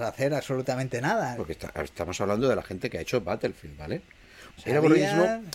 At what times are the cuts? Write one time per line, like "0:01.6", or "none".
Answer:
0:01.4
0:04.6